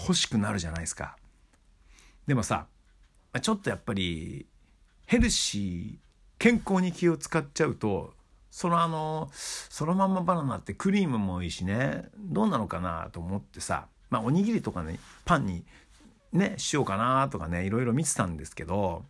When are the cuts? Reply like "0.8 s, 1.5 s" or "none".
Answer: none